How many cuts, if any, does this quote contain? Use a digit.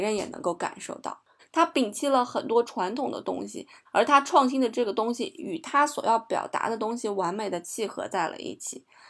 2